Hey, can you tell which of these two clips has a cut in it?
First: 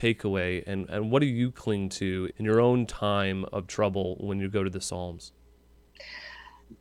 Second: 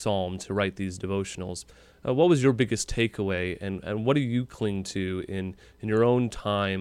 first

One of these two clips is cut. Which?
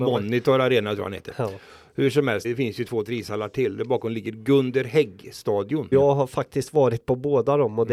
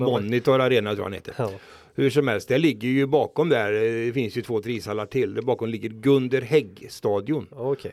first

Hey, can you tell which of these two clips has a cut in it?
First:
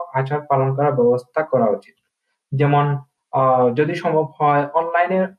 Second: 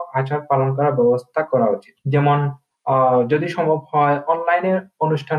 second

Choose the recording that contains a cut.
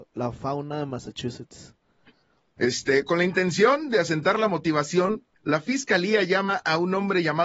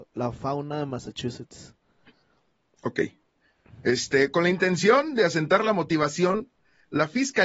first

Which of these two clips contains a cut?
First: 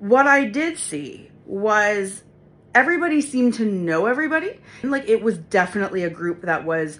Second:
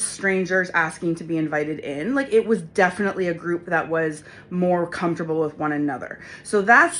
first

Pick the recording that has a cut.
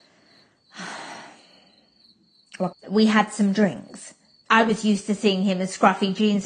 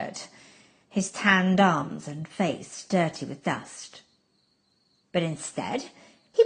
first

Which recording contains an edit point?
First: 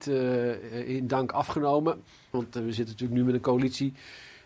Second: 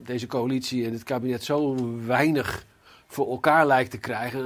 first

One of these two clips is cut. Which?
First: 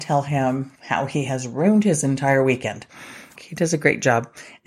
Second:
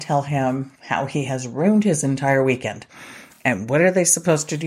first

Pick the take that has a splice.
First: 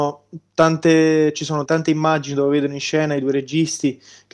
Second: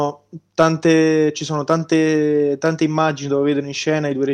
first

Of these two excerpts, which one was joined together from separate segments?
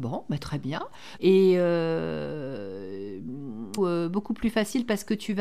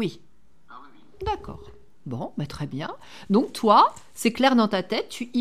first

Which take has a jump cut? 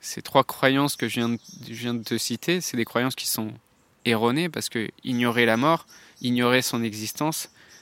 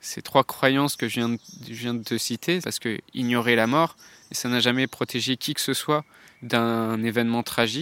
second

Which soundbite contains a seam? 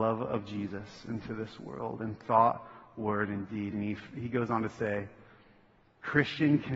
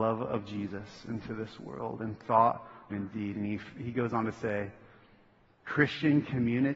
second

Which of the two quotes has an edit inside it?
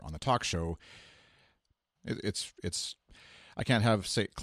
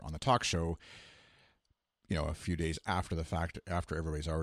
first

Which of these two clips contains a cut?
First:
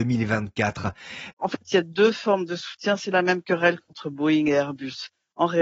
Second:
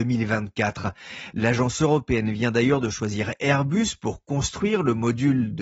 first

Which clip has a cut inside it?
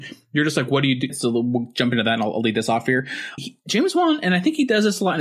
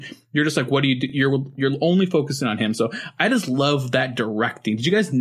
first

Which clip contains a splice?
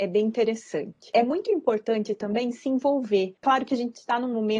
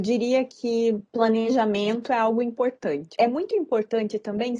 second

